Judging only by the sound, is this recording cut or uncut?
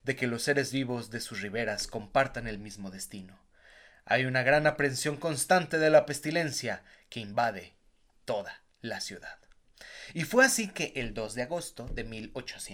uncut